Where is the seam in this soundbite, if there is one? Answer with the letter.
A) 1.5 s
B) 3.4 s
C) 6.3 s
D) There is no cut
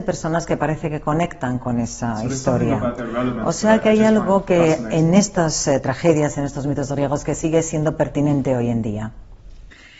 D